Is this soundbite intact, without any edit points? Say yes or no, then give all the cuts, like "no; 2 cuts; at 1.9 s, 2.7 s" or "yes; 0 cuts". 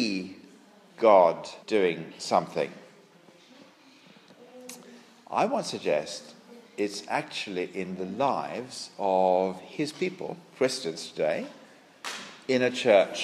no; 1 cut; at 1.6 s